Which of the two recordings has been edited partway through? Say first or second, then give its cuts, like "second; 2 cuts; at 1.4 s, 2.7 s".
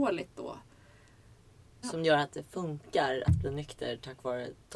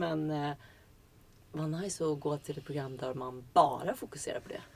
first; 1 cut; at 1.8 s